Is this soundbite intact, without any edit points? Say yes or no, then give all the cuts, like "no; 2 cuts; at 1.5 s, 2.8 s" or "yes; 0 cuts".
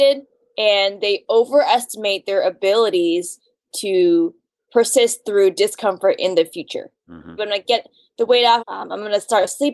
no; 2 cuts; at 7.4 s, 8.6 s